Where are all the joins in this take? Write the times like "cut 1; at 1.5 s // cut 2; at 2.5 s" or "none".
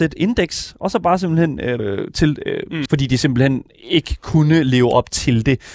cut 1; at 1.8 s // cut 2; at 2.9 s

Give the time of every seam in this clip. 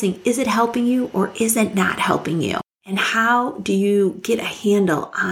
none

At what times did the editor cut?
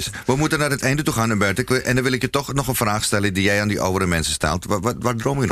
none

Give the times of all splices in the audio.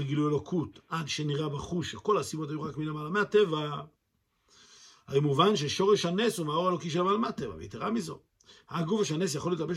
none

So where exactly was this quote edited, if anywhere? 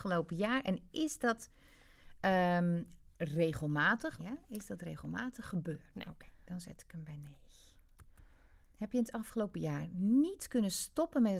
cut 1; at 4.2 s // cut 2; at 5.9 s

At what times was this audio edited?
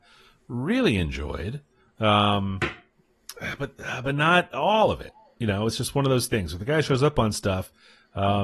none

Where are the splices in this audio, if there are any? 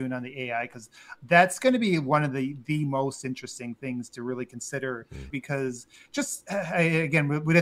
cut 1; at 5.3 s

